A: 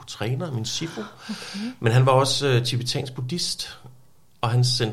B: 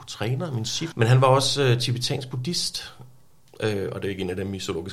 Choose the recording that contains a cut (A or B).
B